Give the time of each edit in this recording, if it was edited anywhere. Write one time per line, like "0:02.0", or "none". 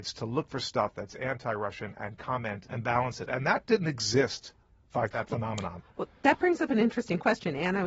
0:05.1